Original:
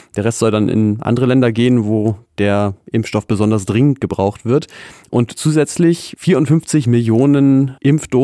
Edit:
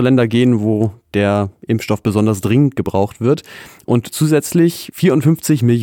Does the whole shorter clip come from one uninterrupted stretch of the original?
yes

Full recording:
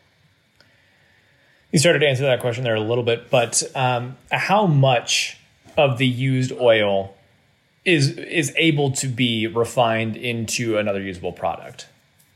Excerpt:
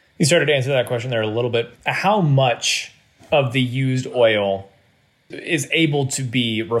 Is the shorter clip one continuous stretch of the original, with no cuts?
no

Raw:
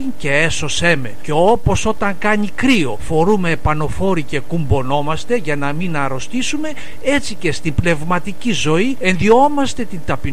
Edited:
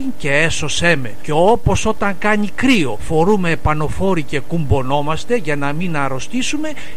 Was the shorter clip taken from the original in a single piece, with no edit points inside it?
yes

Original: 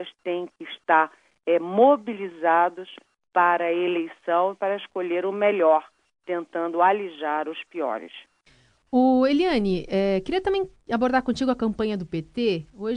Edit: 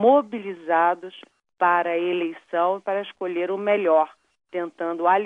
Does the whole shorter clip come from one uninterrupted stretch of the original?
yes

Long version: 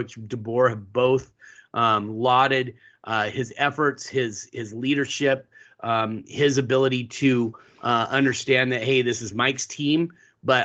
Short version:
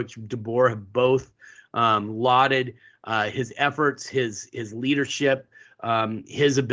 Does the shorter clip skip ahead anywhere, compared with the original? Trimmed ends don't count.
no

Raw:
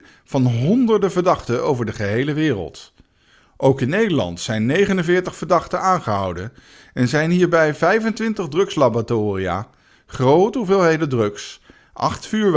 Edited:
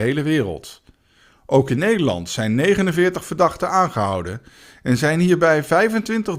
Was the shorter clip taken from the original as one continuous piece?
yes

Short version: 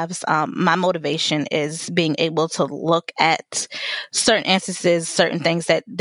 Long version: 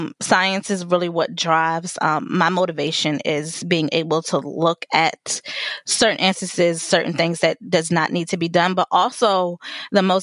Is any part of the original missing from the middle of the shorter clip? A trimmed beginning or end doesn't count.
no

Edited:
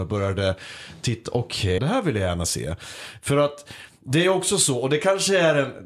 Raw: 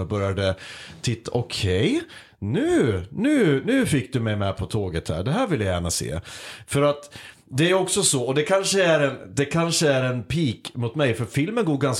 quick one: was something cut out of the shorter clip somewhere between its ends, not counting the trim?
yes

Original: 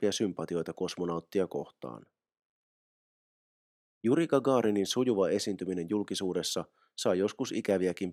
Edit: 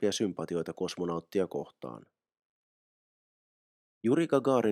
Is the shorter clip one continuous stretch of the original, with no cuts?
yes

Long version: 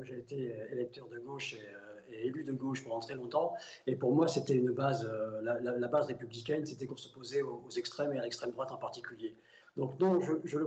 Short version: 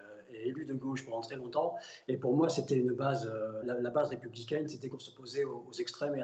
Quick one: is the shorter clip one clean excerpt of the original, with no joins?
no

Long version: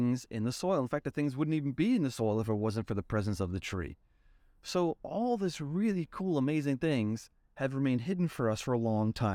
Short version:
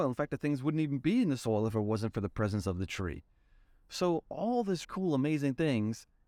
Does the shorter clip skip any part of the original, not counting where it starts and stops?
yes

